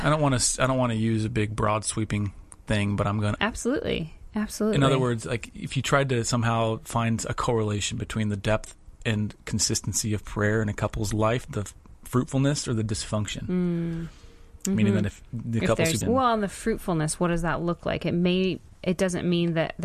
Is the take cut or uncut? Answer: cut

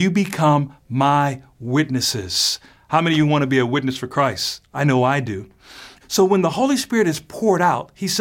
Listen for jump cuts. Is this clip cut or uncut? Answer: cut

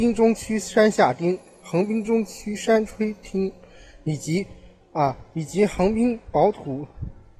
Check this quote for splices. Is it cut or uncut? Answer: uncut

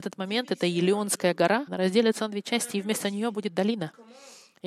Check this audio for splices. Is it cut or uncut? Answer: cut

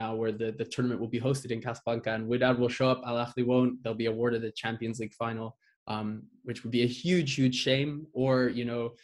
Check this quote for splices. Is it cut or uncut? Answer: uncut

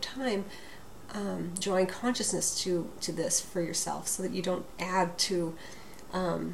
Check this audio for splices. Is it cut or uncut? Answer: uncut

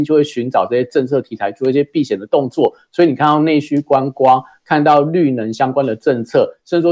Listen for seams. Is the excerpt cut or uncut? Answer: uncut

